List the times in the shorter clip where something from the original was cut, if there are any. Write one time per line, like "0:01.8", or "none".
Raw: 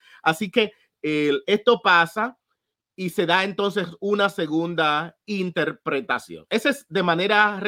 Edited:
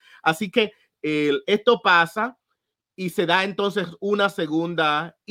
none